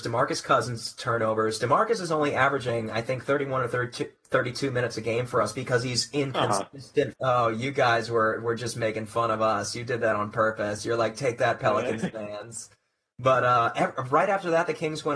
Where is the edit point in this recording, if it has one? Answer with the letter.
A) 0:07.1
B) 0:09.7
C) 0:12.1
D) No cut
A